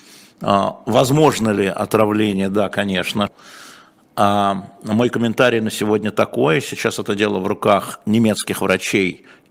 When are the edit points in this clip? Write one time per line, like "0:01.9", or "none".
0:03.3